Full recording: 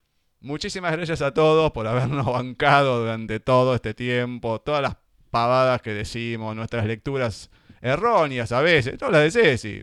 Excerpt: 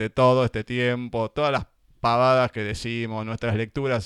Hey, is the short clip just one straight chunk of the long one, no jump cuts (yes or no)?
yes